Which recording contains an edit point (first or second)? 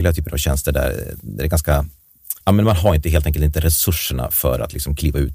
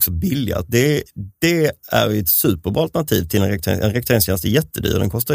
first